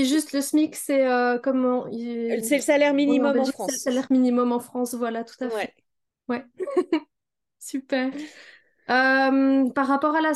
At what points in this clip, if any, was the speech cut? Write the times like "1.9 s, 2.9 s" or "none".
none